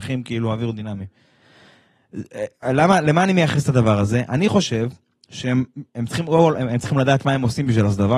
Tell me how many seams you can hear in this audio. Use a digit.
1